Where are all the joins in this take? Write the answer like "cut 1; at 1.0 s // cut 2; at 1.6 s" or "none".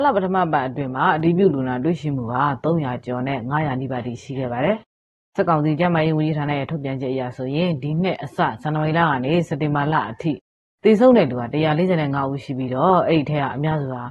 none